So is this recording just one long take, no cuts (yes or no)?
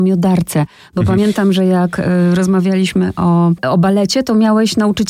yes